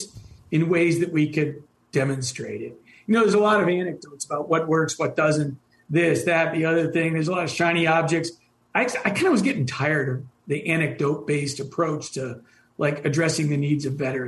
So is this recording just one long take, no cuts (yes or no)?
yes